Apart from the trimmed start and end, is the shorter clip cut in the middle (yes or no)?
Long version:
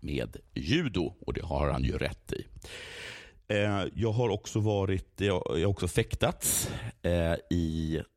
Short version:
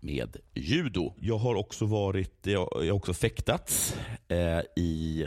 yes